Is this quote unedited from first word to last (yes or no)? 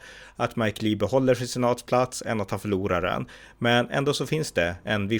yes